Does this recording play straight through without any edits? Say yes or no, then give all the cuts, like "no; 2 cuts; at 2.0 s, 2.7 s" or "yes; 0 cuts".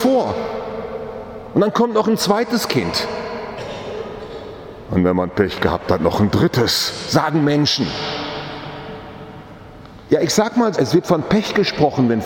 no; 1 cut; at 10.7 s